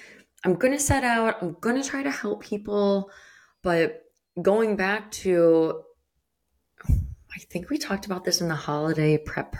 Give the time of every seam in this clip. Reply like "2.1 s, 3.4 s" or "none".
none